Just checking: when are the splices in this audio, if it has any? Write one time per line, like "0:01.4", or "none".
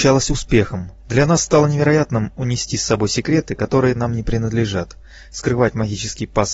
0:01.0